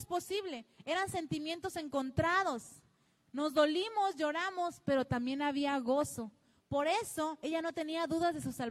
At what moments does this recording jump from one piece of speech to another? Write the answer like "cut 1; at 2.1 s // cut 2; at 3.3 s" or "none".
cut 1; at 6.6 s